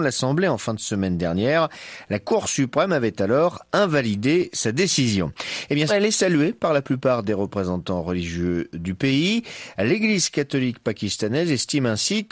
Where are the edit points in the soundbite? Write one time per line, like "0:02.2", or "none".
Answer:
0:05.9